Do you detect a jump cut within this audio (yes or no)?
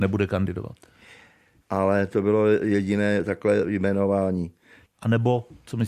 yes